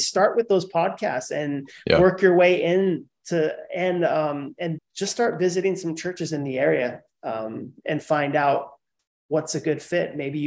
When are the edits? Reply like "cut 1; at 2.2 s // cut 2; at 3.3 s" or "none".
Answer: cut 1; at 4.8 s